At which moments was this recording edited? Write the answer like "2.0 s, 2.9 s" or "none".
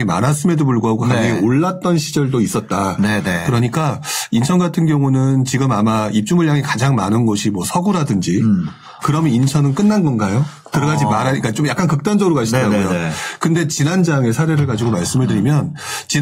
9.0 s